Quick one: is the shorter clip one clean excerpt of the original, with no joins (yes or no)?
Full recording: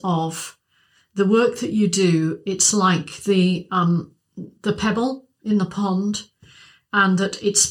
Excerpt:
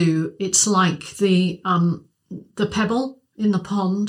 yes